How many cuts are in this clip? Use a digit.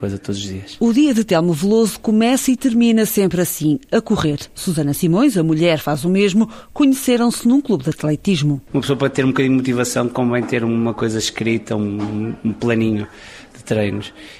0